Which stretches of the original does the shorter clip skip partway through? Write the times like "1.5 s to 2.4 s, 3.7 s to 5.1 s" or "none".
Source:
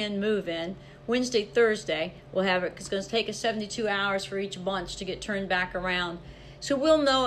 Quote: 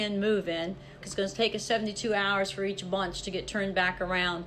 1.0 s to 2.7 s